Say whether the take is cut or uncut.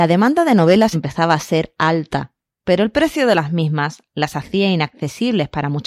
cut